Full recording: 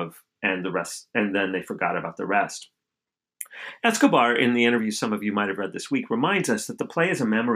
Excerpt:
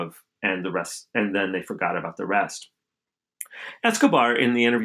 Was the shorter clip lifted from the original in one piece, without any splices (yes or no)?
yes